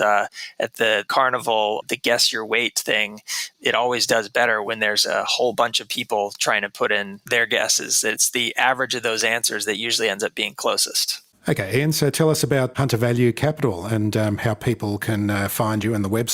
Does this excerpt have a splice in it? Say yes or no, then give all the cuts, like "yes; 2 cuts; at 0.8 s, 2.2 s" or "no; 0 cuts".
no; 0 cuts